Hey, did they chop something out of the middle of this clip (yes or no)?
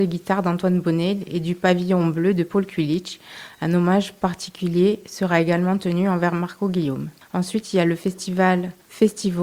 no